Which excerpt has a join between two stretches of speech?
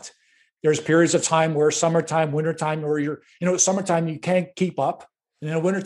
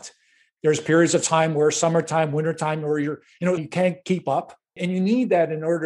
second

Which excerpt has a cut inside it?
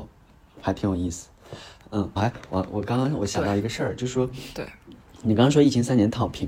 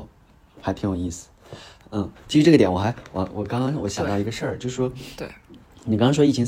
first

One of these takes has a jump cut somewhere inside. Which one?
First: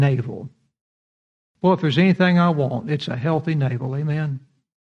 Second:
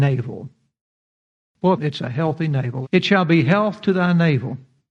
second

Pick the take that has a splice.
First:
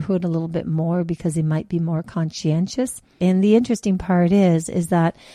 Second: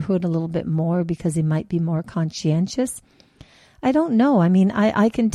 first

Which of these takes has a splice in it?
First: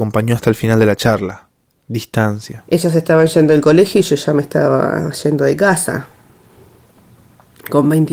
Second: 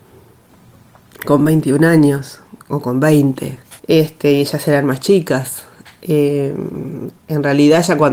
second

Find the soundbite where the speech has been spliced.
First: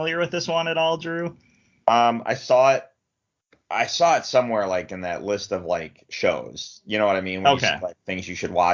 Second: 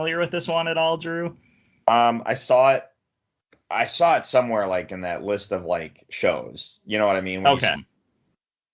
second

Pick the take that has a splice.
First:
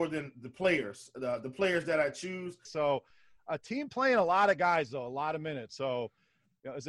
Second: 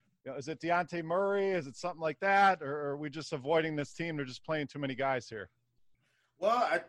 first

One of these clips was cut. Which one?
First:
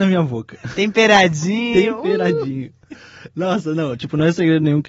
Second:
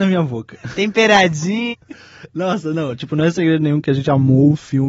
second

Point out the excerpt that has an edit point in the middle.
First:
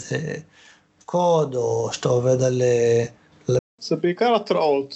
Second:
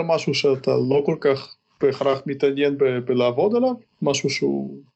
first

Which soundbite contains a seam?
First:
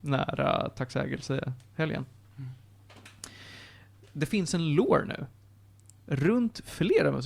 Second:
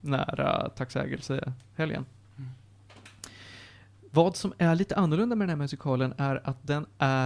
first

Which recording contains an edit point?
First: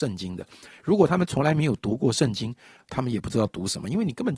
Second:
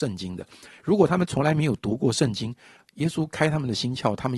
first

